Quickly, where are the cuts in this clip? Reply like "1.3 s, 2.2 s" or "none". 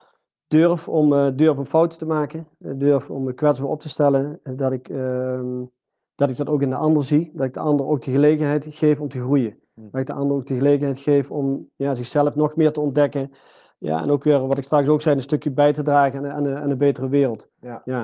none